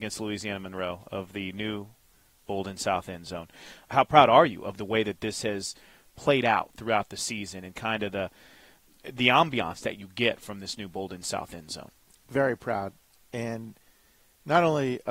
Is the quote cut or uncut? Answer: cut